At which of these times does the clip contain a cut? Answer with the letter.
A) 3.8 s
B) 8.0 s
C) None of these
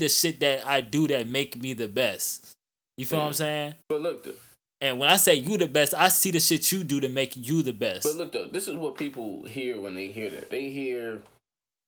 A